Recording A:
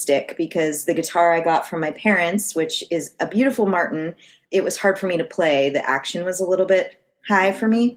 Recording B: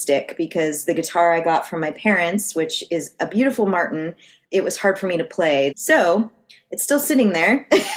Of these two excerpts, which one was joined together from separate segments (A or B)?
B